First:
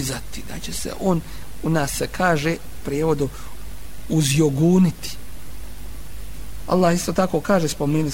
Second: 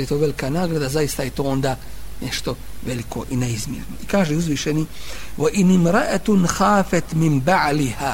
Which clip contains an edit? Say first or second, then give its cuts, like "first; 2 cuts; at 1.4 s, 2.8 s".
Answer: first; 1 cut; at 6.7 s